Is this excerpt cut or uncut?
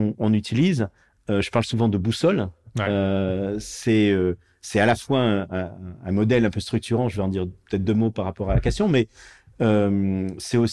uncut